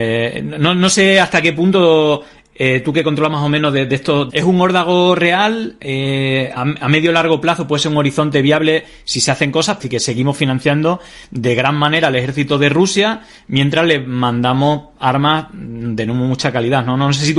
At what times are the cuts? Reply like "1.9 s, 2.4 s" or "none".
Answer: 4.3 s, 6.6 s, 9.8 s